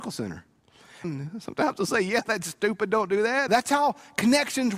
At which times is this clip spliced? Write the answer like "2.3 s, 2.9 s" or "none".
1.0 s, 3.5 s

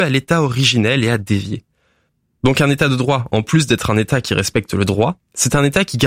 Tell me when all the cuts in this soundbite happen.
none

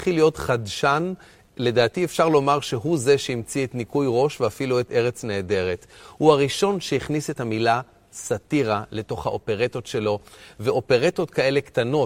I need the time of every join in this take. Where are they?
none

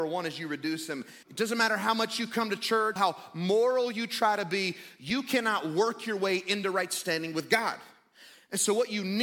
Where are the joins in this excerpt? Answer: 1.2 s, 3.0 s

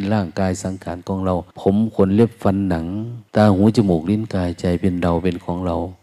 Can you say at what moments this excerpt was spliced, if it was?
1.5 s, 3.3 s

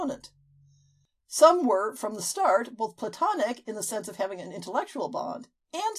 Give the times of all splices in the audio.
none

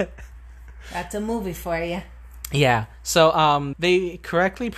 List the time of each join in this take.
3.7 s

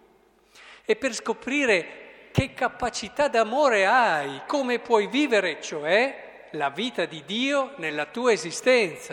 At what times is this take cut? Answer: 4.5 s

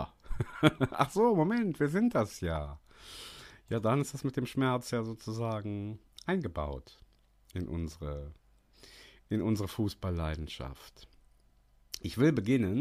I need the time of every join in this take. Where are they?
none

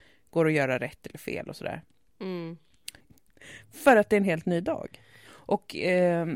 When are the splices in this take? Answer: 3.0 s, 5.2 s

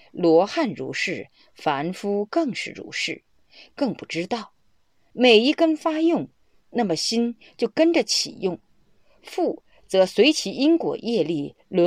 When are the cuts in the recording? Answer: 5.1 s

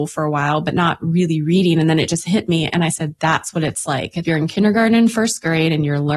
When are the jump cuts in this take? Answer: 3.2 s, 4.2 s

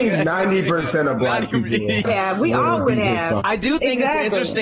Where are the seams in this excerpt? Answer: 2.0 s, 3.4 s

